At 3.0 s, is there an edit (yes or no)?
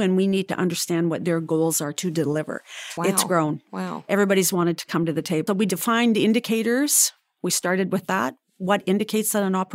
yes